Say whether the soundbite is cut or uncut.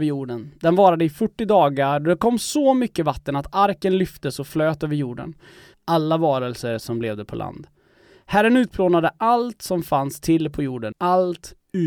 cut